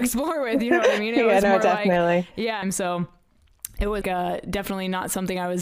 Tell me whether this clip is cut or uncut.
cut